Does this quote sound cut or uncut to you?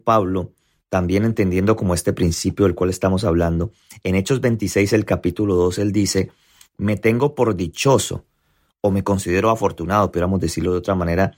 uncut